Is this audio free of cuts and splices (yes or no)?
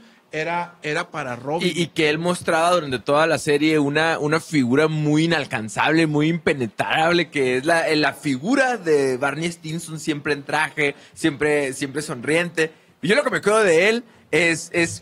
yes